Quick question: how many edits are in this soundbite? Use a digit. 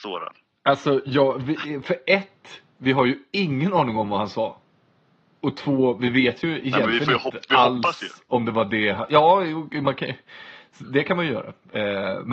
0